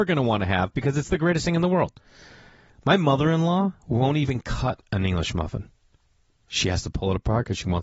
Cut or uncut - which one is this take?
uncut